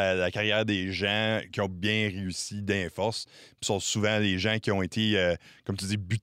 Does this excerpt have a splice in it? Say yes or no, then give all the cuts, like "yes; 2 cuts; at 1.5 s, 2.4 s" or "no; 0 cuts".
no; 0 cuts